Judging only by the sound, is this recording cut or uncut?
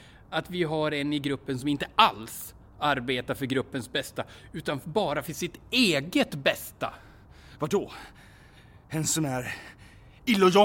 uncut